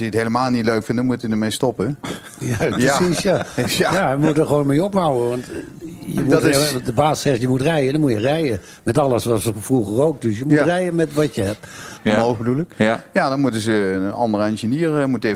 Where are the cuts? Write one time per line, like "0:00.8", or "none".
0:12.0